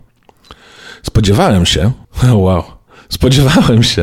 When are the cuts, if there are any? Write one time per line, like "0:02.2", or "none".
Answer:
0:02.0